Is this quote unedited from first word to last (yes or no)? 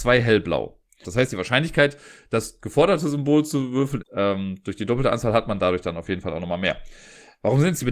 no